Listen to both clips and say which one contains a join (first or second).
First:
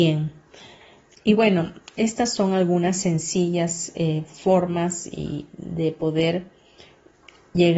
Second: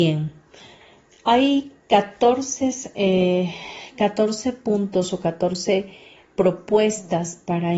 first